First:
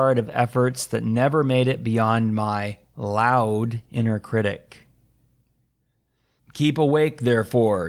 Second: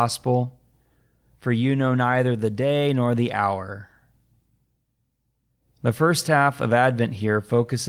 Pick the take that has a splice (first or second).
first